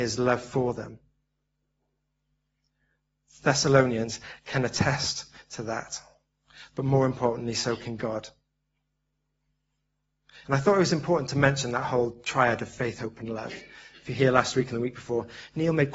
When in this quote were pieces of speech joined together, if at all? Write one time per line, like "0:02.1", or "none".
0:10.4